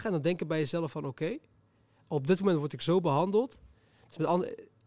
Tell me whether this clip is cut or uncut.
uncut